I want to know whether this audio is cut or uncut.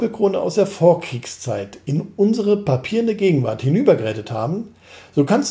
uncut